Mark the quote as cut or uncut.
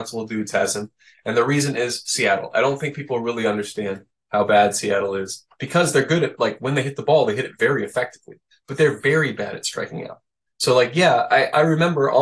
uncut